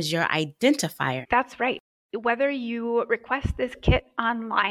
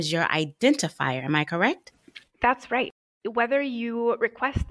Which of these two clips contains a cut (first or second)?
first